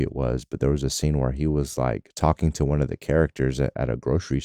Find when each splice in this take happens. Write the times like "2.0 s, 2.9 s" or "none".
none